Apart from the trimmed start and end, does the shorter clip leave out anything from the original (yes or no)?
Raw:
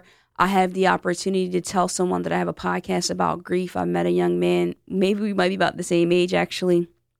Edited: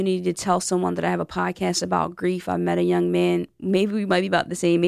no